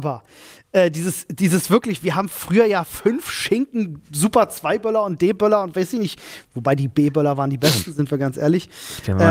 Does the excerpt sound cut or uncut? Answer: uncut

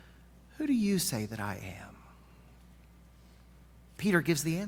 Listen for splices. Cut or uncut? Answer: uncut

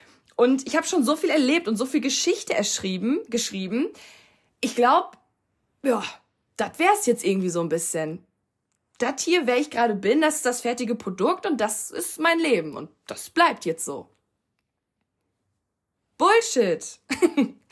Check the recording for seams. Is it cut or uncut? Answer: uncut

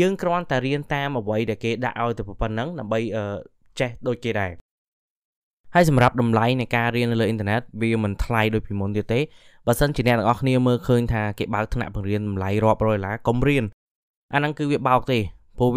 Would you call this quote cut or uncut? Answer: uncut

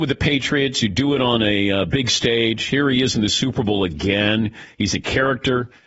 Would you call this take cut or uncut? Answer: uncut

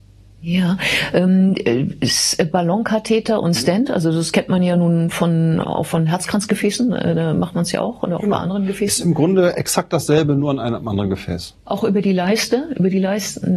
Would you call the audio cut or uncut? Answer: uncut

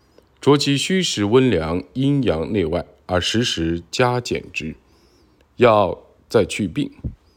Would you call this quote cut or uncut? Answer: uncut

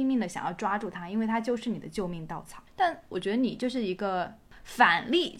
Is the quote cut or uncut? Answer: cut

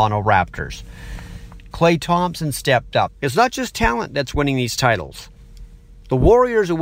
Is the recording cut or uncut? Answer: cut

